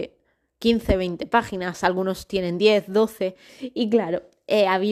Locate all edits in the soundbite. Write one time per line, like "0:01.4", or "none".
0:03.5